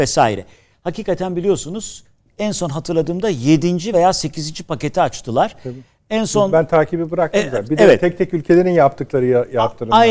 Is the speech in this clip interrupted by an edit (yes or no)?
no